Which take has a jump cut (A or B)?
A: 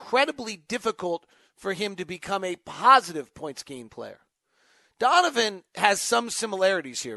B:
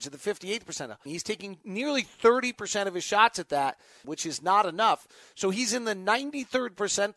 B